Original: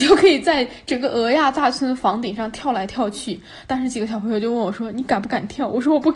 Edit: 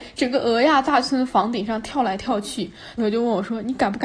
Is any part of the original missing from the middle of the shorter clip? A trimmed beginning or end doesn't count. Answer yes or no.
yes